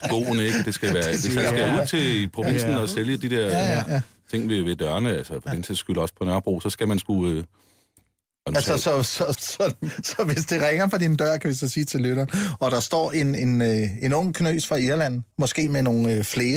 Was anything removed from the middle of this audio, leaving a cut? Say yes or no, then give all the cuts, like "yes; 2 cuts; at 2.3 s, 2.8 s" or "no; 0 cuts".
yes; 3 cuts; at 9.3 s, 13.4 s, 15.3 s